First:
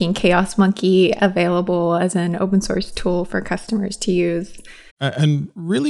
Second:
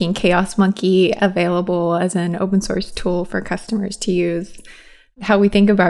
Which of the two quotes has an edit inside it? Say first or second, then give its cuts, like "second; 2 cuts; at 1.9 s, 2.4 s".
first; 1 cut; at 4.9 s